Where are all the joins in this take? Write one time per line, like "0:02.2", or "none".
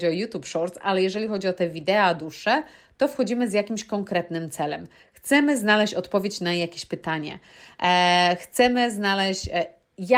none